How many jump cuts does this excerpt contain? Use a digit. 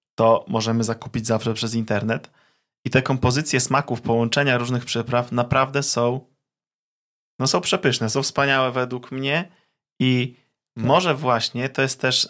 0